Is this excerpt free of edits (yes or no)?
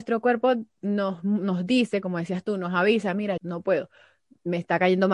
no